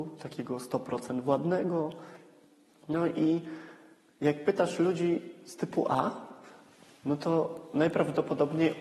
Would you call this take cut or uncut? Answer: cut